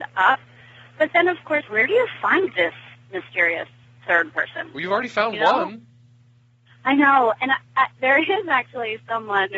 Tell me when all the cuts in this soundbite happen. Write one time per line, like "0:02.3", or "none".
0:01.6